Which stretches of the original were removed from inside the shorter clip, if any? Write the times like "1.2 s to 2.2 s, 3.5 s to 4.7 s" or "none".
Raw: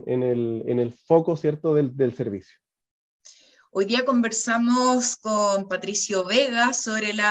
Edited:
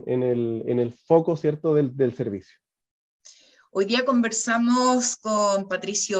none